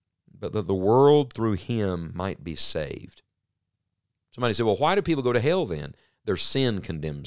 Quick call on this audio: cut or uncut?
uncut